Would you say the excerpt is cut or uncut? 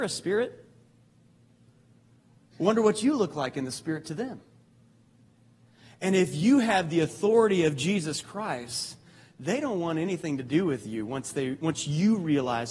uncut